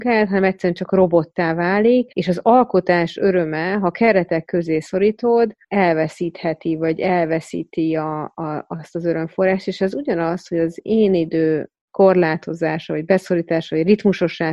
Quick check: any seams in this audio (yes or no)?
no